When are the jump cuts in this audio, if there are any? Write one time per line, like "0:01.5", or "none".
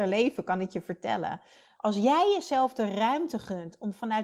0:01.8